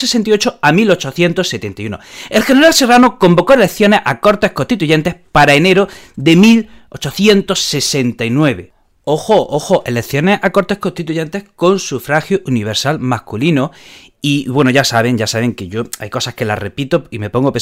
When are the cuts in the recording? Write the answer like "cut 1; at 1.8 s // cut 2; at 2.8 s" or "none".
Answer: none